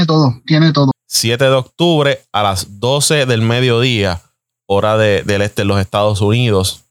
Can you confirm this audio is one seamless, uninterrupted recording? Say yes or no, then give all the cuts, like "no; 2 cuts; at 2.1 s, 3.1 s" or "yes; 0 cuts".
no; 1 cut; at 0.9 s